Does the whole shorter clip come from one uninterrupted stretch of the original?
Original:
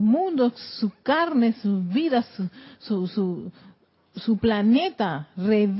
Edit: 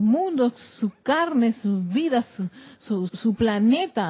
no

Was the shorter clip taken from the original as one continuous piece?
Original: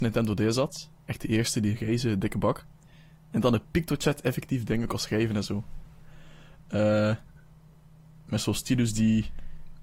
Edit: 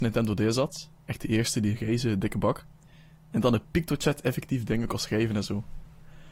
yes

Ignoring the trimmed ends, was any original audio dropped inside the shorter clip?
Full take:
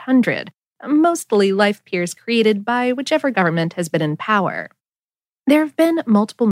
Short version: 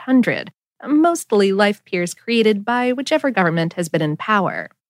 no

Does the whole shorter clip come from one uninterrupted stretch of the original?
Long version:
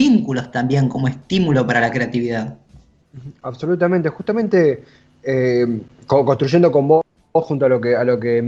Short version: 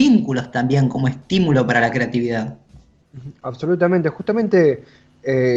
yes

